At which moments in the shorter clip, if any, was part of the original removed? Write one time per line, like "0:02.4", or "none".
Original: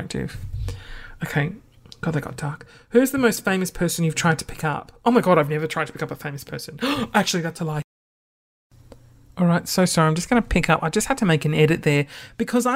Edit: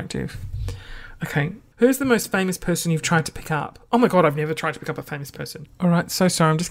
0:01.7
0:05.7

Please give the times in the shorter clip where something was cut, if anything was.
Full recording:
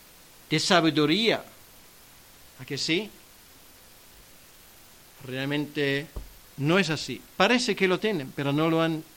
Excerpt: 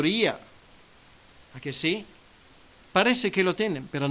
0:02.8

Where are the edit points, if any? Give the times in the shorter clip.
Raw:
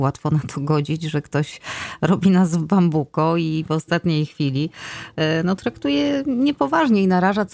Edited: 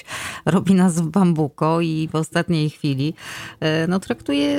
none

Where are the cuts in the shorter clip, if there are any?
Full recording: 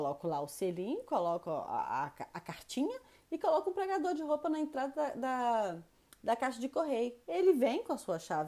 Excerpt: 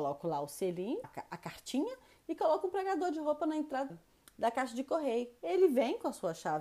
0:01.0
0:03.9

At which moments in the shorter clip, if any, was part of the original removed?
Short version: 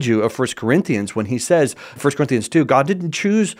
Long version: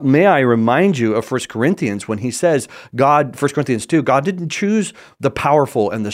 0:02.0

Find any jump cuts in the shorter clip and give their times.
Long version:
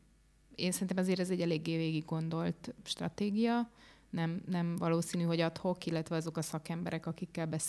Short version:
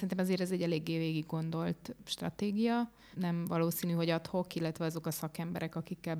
0:03.1

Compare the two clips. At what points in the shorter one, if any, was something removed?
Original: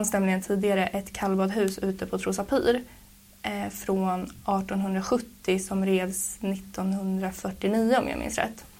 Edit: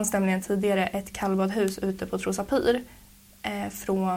none

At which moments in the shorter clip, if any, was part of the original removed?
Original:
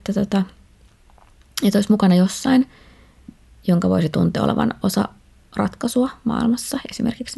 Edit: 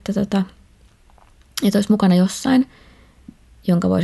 none

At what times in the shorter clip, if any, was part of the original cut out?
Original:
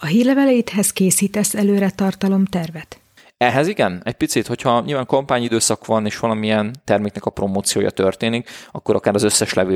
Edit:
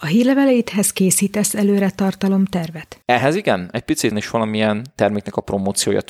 0:03.0
0:04.1

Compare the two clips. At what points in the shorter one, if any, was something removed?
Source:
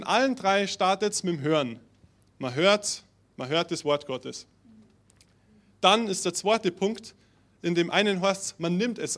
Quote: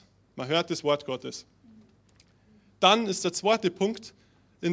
none

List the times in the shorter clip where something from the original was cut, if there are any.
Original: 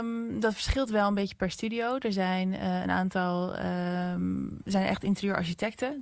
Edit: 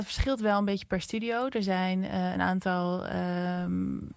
none

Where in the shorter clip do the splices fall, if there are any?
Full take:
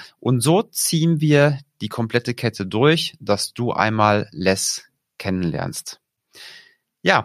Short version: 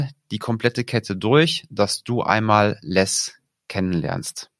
none

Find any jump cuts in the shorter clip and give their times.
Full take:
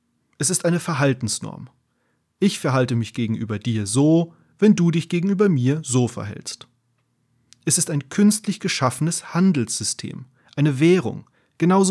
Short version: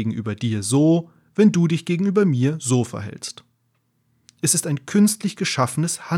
none

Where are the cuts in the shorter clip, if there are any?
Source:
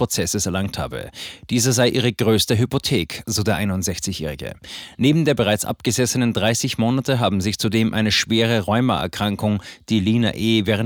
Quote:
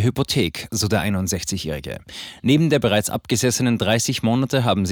none

